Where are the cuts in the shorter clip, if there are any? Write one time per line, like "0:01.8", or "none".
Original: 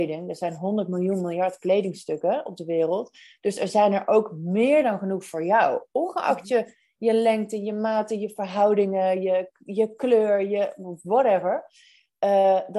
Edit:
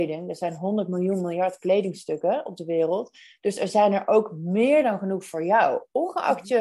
none